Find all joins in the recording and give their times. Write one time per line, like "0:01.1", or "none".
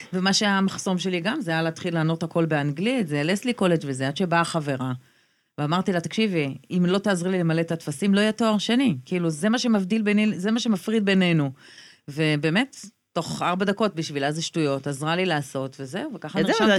none